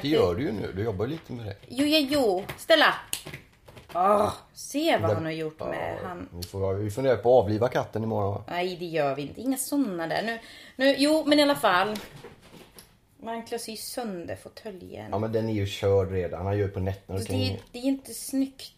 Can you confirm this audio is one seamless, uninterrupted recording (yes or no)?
no